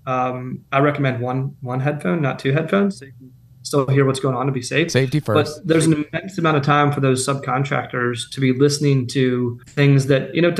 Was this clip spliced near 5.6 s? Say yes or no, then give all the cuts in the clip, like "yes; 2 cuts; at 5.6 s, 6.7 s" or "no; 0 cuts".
no; 1 cut; at 9.6 s